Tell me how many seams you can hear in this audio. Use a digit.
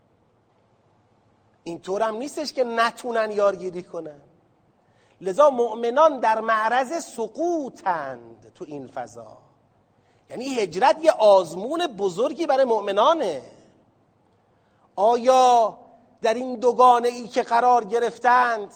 0